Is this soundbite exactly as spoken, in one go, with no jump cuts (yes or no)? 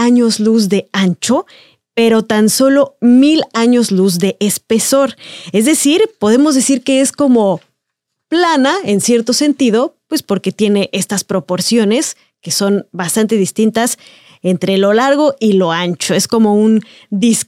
yes